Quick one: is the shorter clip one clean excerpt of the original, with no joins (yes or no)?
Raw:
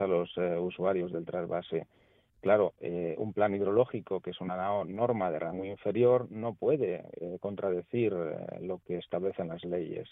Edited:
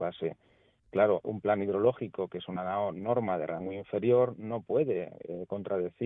no